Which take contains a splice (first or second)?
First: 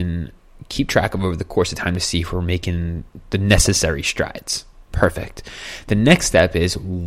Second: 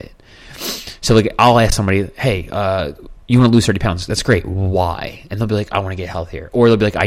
second